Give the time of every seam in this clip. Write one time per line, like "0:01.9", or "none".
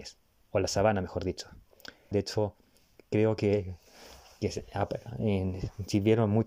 0:02.1